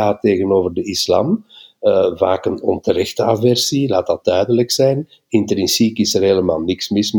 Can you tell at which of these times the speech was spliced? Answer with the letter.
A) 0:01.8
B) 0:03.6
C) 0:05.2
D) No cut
D